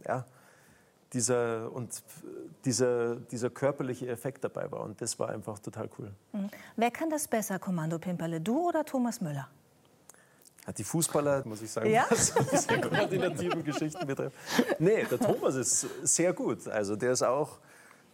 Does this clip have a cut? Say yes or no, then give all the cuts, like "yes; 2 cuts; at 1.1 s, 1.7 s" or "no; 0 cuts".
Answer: yes; 1 cut; at 11.4 s